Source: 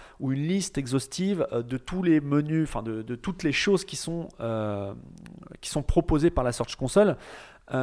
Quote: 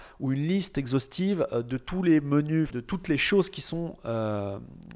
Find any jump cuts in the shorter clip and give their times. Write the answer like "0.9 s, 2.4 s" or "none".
2.7 s